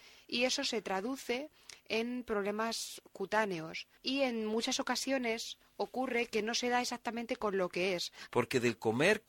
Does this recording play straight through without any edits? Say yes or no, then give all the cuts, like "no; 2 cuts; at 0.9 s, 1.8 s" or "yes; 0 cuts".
no; 2 cuts; at 4.0 s, 8.3 s